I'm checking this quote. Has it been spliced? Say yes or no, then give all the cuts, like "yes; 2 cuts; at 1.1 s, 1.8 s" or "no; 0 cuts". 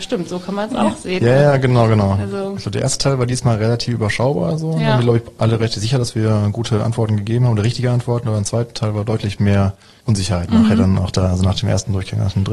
no; 0 cuts